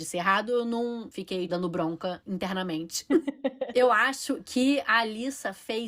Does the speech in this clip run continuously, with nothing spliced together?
no; 1 cut; at 1.5 s

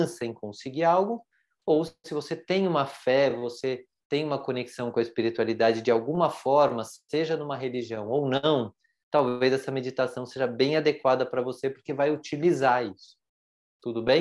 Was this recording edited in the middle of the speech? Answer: no; 0 cuts

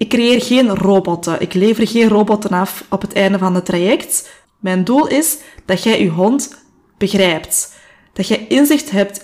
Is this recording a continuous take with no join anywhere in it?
no; 1 cut; at 4.4 s

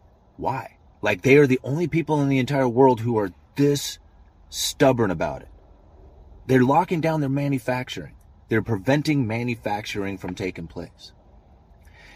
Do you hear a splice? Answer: yes; 1 cut; at 6.4 s

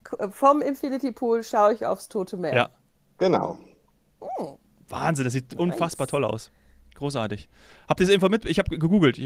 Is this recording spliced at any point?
no; 0 cuts

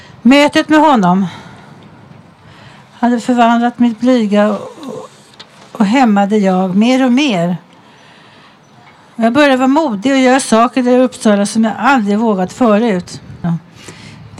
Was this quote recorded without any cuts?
no; 1 cut; at 13.4 s

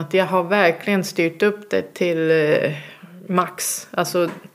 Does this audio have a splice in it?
no; 0 cuts

